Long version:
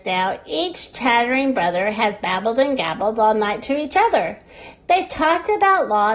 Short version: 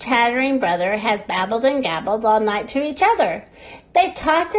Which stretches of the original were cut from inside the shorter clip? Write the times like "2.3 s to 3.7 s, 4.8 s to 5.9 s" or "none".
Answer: none